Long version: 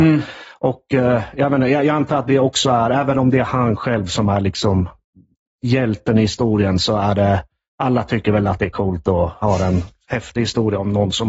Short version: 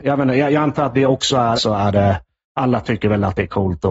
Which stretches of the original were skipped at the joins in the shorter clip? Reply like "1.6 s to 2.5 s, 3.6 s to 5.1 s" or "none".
2.9 s to 6.8 s